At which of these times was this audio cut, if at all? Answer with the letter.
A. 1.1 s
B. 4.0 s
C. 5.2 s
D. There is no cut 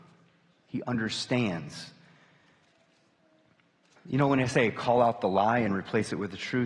B